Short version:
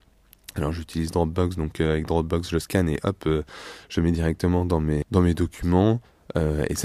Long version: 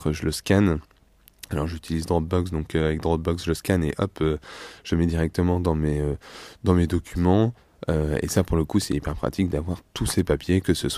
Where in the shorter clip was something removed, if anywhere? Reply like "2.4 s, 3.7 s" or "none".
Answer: 5.0 s